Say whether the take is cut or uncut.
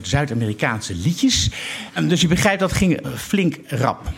cut